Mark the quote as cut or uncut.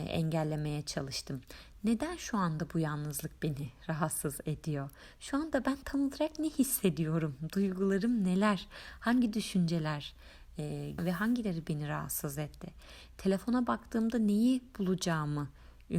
cut